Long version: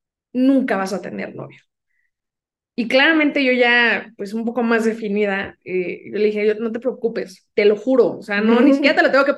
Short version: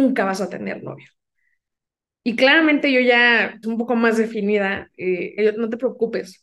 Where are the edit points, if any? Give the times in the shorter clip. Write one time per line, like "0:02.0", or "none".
0:03.6
0:05.4